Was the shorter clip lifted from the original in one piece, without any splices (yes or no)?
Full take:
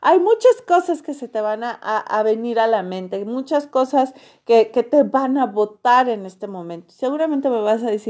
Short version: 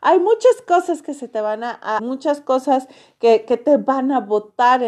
no